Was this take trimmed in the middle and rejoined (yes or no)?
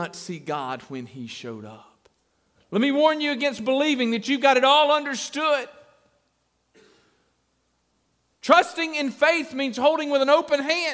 yes